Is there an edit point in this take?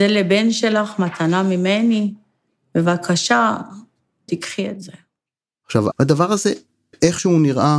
yes; 2 cuts; at 4.3 s, 5.9 s

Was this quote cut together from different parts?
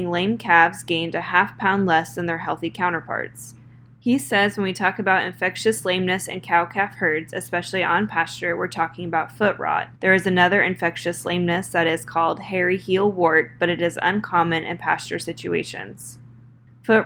yes; 1 cut; at 10.0 s

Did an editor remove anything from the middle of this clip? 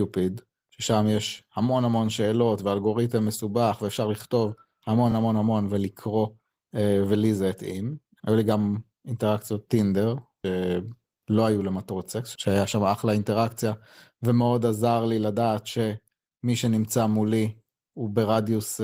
no; 0 cuts

